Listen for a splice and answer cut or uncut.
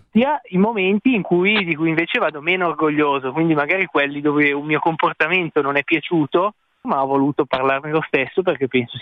cut